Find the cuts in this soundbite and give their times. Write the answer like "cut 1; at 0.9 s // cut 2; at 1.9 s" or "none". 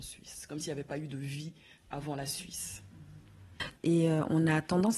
cut 1; at 3.7 s